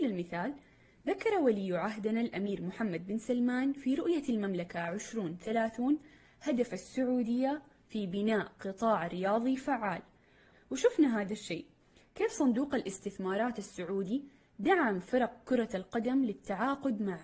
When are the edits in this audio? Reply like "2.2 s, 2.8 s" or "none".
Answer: 10.5 s